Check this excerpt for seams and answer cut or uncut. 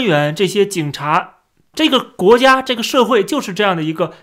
cut